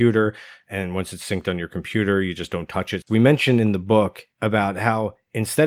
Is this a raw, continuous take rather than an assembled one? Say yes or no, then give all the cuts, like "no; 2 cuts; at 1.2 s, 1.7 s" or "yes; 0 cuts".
no; 2 cuts; at 3.0 s, 4.3 s